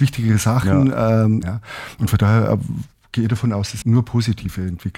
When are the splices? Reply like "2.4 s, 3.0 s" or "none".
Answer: 1.4 s, 3.8 s